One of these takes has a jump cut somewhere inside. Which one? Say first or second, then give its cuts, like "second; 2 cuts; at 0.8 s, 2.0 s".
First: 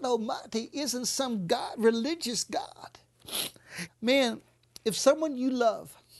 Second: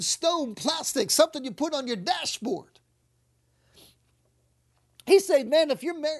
first; 1 cut; at 3.9 s